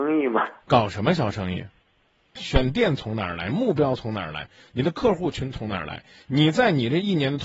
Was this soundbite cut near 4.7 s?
no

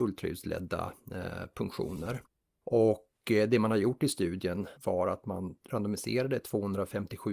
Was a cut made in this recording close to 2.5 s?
no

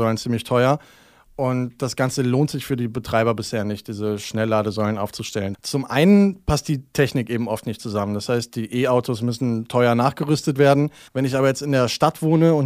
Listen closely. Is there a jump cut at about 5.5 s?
yes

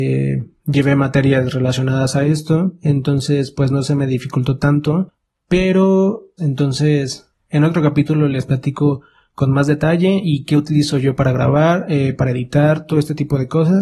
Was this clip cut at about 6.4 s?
yes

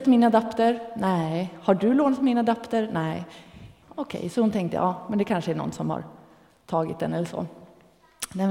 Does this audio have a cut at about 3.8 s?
yes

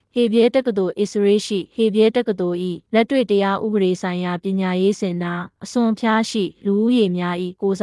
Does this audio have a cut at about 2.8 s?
yes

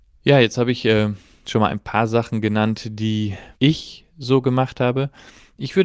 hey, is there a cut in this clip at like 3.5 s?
yes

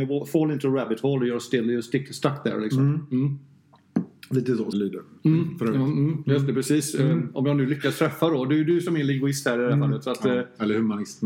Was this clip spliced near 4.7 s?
yes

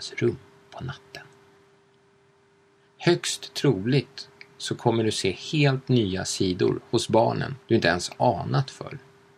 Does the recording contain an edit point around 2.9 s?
yes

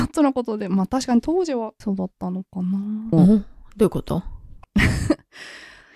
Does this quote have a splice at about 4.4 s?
no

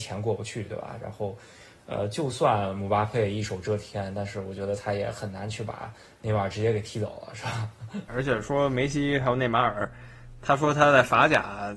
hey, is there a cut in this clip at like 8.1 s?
yes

